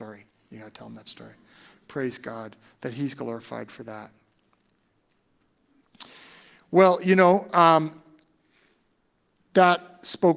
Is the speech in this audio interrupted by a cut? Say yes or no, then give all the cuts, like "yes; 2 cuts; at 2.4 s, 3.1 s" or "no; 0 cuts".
no; 0 cuts